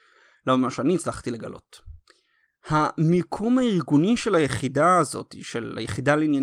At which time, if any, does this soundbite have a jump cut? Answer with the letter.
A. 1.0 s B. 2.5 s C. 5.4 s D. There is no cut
B